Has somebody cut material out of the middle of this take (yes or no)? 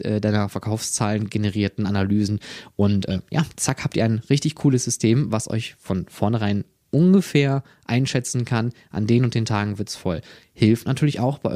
no